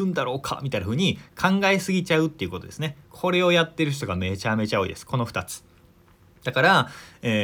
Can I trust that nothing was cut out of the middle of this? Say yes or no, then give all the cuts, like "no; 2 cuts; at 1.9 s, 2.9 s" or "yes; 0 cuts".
yes; 0 cuts